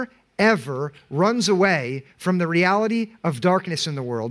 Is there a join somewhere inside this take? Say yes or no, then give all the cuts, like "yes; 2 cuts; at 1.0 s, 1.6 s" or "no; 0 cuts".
no; 0 cuts